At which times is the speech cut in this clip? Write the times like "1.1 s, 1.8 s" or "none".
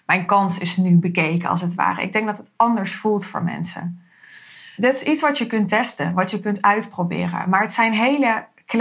none

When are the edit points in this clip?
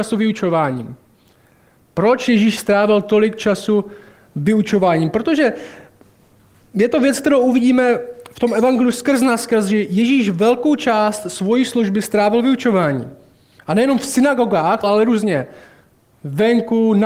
14.8 s

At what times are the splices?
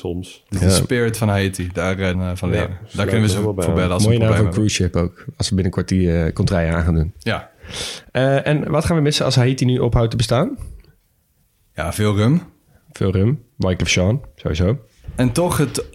2.1 s

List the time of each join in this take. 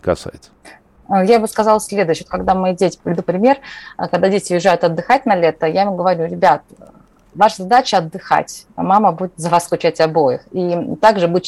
none

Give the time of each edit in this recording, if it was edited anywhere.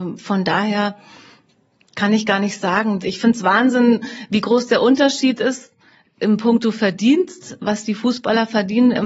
3.0 s

